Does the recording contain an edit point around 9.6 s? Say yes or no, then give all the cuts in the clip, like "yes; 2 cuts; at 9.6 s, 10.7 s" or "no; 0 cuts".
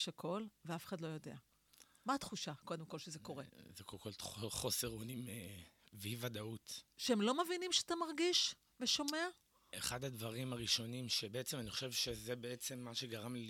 no; 1 cut; at 6.9 s